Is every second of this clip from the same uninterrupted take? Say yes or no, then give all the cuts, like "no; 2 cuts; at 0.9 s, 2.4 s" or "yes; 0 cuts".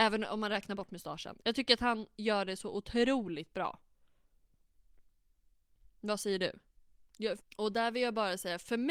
no; 1 cut; at 7.4 s